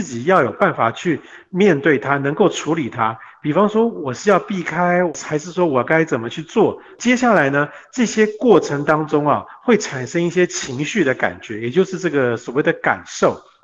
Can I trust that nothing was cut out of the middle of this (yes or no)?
yes